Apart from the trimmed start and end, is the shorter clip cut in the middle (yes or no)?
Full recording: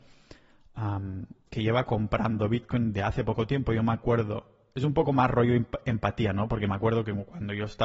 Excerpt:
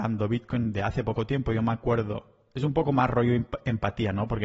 no